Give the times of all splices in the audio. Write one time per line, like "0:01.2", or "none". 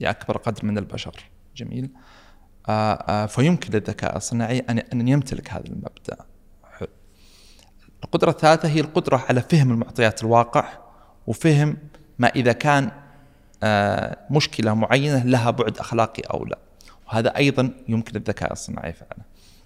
none